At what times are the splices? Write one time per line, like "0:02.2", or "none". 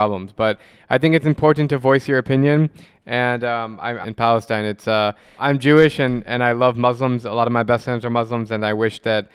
0:04.0
0:05.4